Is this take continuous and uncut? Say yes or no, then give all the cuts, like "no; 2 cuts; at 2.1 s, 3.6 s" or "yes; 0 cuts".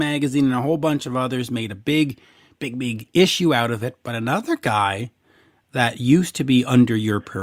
yes; 0 cuts